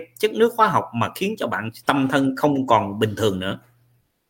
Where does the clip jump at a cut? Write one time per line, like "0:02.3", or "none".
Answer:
0:01.8